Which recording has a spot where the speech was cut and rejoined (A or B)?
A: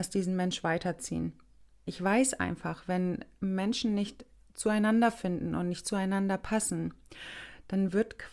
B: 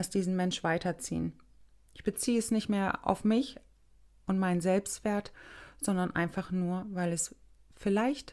A